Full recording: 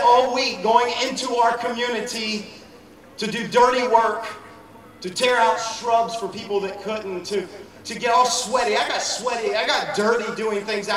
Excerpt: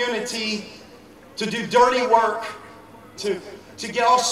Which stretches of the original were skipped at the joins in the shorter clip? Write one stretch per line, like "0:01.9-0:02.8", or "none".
0:05.0-0:07.2